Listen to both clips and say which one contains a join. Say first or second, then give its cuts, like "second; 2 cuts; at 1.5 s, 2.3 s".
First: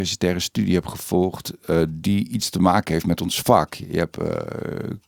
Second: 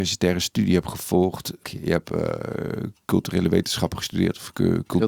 second; 1 cut; at 1.6 s